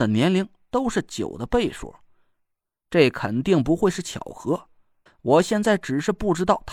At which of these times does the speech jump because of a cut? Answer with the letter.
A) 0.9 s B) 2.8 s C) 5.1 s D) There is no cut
C